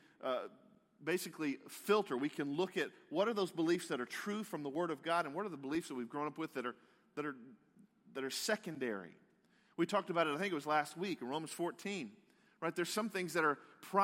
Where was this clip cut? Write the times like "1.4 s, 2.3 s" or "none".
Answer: none